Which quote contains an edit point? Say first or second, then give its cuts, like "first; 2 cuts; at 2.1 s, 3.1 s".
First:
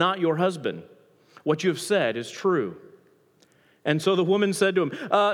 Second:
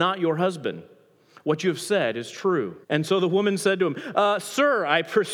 second; 1 cut; at 2.8 s